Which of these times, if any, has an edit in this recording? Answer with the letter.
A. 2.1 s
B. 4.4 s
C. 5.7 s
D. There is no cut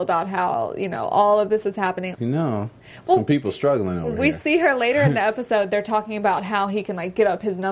A